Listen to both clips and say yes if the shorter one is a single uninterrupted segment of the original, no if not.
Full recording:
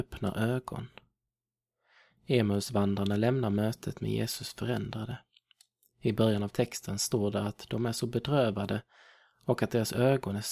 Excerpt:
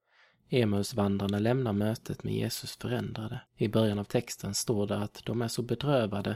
no